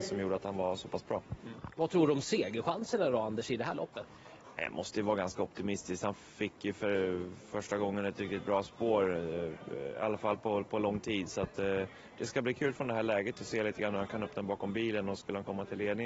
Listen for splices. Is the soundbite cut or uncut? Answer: uncut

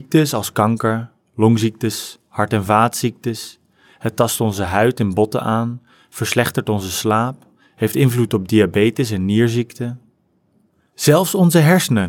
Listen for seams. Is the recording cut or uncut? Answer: uncut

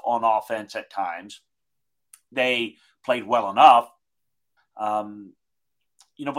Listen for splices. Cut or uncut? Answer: cut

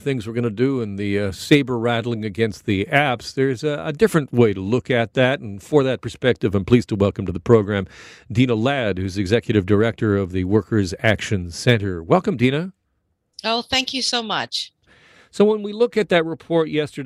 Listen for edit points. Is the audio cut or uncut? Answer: uncut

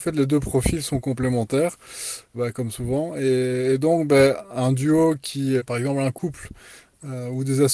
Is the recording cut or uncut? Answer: cut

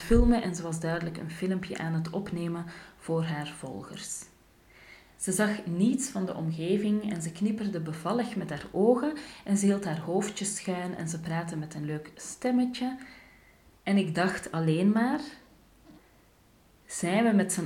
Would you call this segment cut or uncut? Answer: uncut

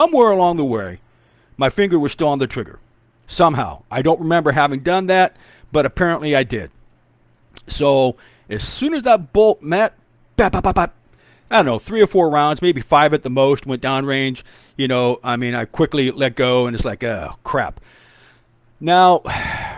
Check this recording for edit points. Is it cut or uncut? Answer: uncut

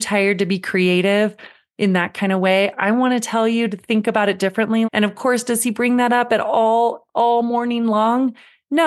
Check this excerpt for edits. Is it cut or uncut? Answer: cut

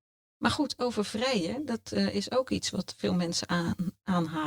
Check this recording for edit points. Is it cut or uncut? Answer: uncut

